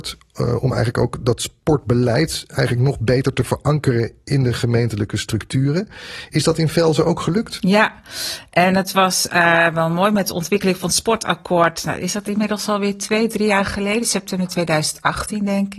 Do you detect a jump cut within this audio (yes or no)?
no